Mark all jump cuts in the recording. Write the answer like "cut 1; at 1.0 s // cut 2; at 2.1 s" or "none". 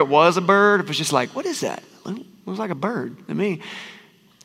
none